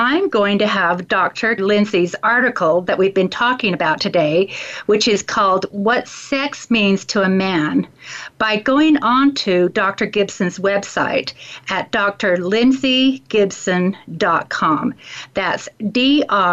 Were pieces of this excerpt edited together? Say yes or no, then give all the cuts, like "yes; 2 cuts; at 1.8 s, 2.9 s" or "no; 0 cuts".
yes; 1 cut; at 1.6 s